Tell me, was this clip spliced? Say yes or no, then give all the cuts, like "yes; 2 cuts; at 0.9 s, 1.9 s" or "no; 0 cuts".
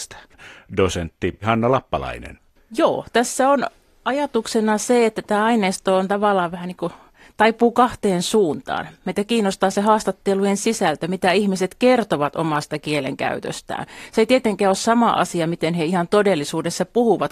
no; 0 cuts